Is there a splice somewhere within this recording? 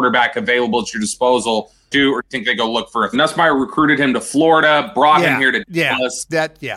yes; 2 cuts; at 1.9 s, 3.1 s

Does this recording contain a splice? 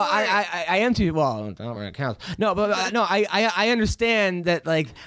no; 0 cuts

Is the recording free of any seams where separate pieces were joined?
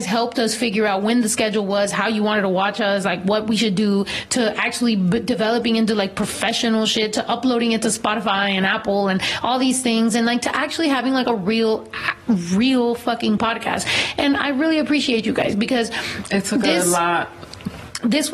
yes; 0 cuts

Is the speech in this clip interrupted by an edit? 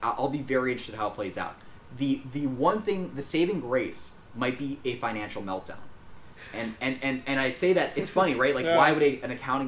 no; 0 cuts

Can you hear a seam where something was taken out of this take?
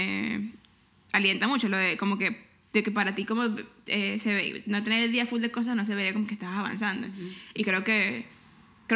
yes; 1 cut; at 7.6 s

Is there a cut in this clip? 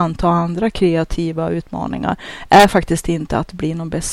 no; 0 cuts

